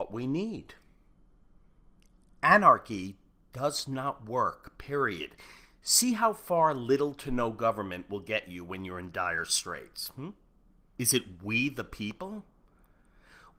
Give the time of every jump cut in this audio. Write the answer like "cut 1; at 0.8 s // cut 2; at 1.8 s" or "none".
cut 1; at 10.9 s